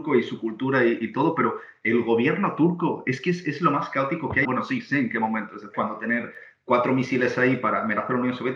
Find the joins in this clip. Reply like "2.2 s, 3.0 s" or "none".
4.4 s, 5.7 s